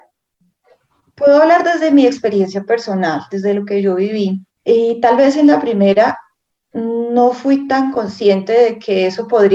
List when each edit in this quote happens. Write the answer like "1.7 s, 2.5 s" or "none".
4.5 s